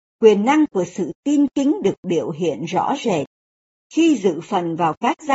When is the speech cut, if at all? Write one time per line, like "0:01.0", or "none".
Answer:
0:03.8